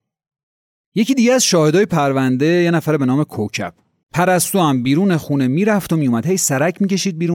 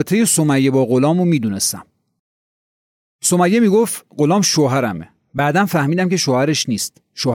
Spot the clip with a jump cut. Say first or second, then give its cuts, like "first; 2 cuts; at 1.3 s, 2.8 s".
first; 1 cut; at 4.0 s